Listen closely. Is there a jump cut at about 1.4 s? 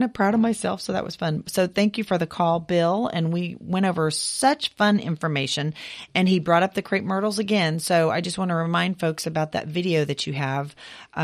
no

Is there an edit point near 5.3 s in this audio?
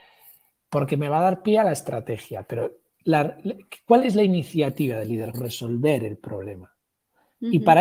yes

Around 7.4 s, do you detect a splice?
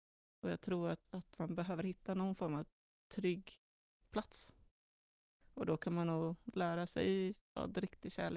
yes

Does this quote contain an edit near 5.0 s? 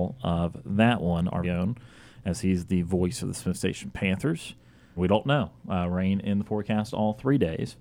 yes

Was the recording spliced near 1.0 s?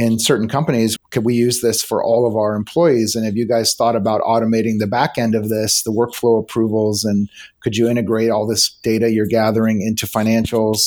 yes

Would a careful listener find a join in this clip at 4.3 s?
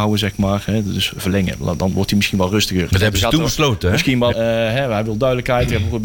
yes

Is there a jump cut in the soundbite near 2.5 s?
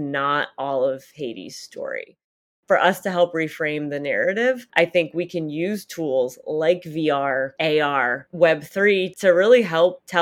no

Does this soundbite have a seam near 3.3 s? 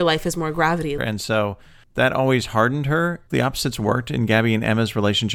yes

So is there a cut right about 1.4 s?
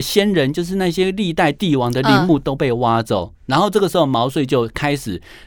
no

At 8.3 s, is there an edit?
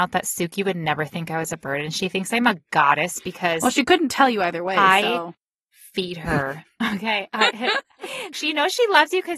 yes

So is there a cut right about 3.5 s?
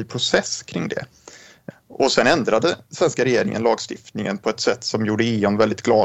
no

